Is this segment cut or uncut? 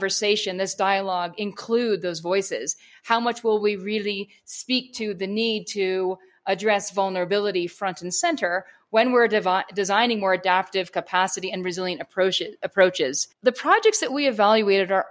uncut